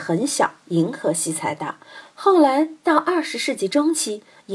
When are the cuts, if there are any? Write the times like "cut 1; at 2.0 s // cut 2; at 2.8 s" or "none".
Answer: none